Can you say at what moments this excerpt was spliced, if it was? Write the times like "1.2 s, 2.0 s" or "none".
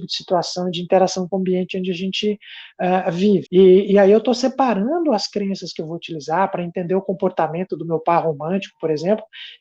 3.4 s